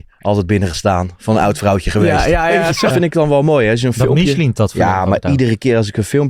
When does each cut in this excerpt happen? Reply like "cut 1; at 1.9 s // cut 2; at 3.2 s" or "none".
cut 1; at 2.9 s